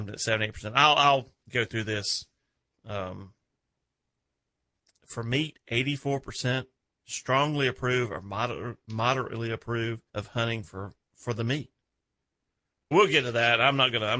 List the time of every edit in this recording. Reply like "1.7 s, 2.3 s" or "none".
10.1 s, 12.9 s